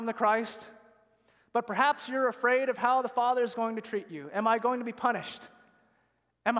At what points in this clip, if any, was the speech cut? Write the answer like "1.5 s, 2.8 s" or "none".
none

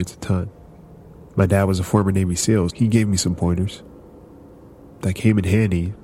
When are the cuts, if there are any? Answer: 2.7 s

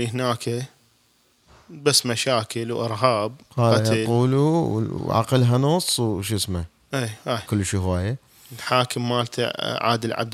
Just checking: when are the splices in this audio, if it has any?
7.5 s

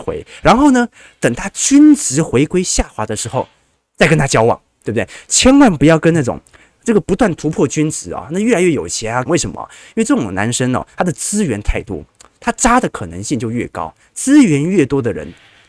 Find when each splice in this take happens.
9.3 s

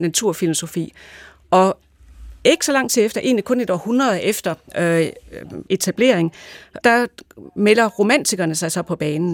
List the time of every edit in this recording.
5.7 s, 6.8 s

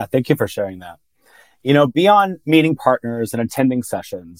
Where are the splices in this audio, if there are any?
none

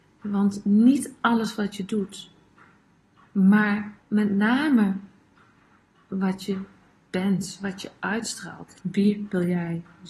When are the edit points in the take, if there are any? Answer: 4.0 s, 8.7 s

